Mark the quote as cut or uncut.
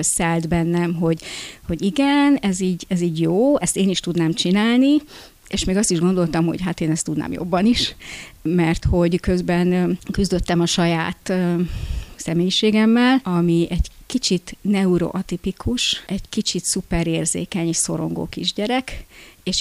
uncut